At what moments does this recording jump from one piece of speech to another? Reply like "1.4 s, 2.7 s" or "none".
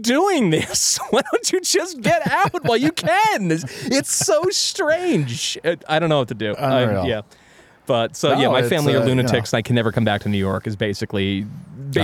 none